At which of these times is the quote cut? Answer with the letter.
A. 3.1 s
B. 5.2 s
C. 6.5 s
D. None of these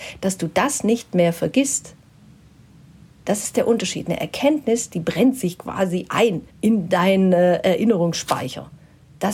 C